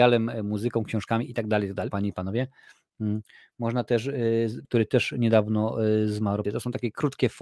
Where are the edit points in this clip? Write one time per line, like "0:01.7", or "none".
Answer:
0:01.9
0:04.6
0:06.4